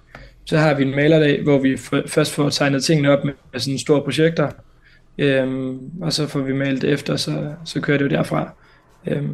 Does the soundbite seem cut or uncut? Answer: uncut